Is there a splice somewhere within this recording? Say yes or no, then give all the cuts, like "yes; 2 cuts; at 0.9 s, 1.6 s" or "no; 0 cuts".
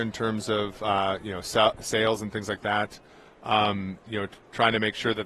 no; 0 cuts